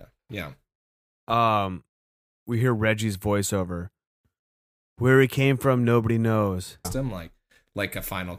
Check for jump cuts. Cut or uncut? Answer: cut